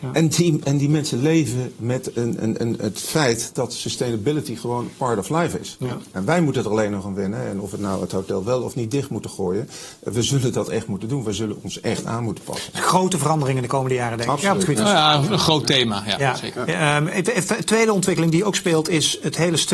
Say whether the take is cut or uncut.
uncut